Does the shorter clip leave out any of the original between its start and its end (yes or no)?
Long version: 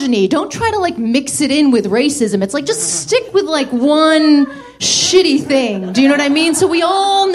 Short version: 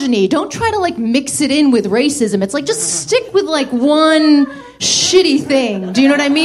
no